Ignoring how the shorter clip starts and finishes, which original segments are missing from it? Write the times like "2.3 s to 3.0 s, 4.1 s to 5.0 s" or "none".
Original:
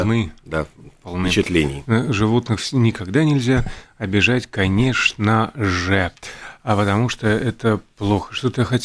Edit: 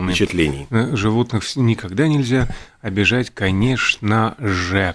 none